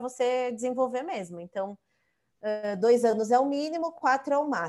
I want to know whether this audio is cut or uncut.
uncut